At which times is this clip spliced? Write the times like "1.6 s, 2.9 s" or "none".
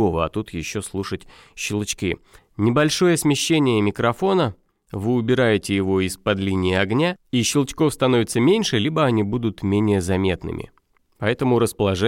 2.4 s, 7.2 s